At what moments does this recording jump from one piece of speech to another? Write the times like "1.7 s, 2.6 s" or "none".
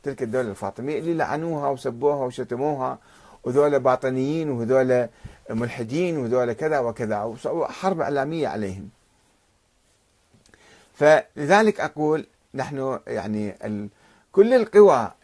none